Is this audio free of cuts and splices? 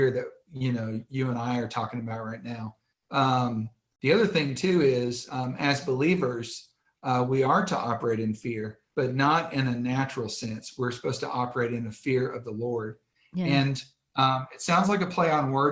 yes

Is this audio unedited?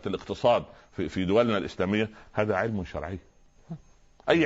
no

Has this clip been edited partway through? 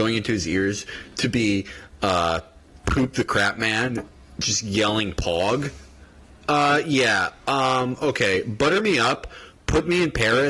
no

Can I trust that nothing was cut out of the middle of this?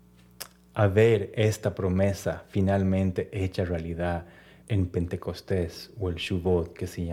no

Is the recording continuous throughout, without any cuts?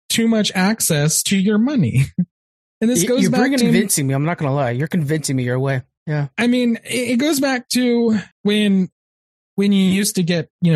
no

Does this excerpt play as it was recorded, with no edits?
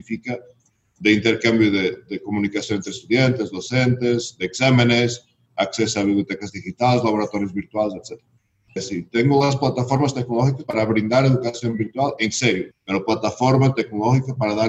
no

